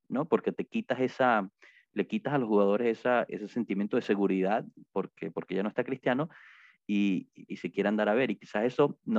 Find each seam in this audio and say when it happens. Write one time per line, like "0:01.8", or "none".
0:03.3
0:07.5